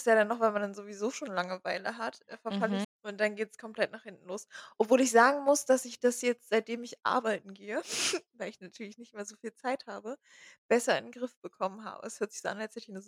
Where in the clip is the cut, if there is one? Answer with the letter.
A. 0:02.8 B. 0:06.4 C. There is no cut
A